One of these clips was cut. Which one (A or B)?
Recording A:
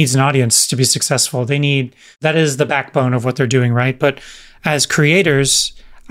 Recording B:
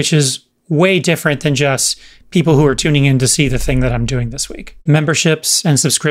B